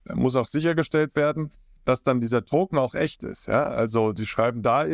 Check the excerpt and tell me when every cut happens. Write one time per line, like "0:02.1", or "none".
none